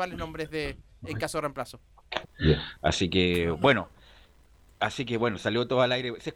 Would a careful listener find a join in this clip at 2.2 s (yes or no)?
yes